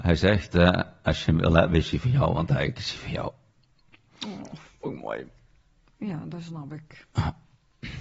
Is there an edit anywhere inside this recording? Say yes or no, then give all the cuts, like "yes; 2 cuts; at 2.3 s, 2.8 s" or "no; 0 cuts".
no; 0 cuts